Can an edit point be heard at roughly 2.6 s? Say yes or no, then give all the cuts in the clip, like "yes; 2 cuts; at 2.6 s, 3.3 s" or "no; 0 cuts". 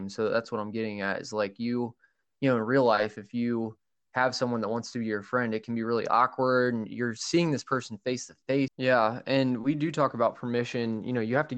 no; 1 cut; at 8.7 s